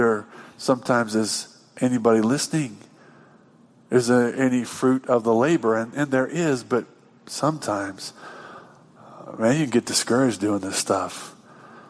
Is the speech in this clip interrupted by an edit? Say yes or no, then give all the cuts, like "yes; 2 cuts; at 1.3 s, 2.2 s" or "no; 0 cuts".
no; 0 cuts